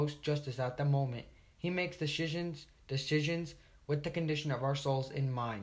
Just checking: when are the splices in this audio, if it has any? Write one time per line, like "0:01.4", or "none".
none